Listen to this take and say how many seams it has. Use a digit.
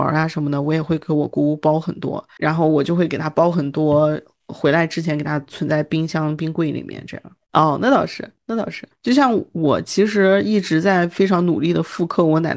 3